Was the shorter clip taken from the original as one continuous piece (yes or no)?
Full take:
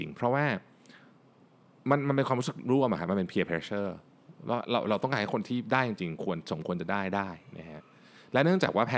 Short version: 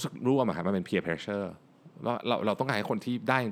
yes